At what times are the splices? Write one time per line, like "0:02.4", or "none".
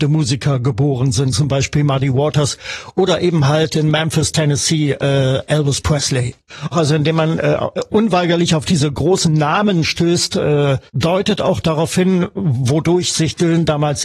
0:01.3